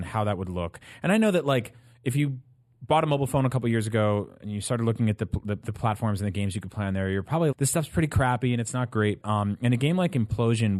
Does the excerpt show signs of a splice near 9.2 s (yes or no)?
yes